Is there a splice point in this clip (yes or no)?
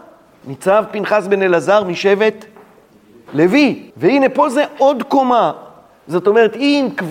yes